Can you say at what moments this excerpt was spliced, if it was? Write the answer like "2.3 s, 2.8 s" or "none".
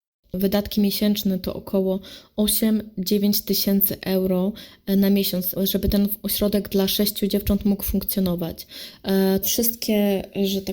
5.6 s, 9.4 s